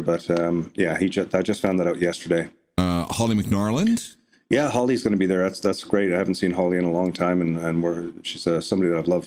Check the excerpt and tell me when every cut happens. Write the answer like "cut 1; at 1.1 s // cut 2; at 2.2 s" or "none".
none